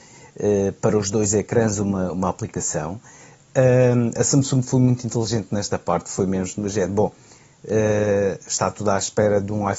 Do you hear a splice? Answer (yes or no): no